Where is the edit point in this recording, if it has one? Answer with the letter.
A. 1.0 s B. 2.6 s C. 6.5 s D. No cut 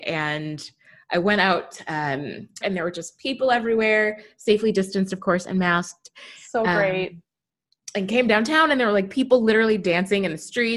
B